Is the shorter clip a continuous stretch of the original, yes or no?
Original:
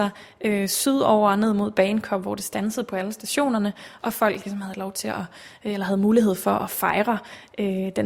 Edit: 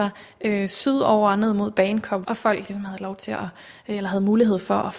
no